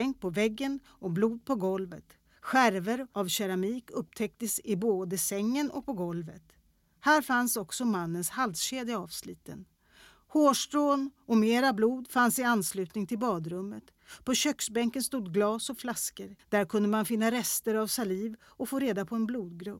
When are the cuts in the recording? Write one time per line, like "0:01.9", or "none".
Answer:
0:16.4